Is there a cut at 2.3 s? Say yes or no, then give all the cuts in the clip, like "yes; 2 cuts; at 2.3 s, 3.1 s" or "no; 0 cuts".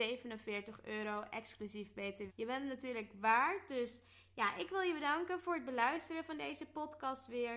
yes; 1 cut; at 2.3 s